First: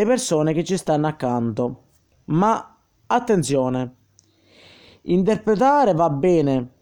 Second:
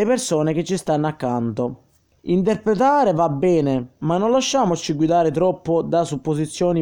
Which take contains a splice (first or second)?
second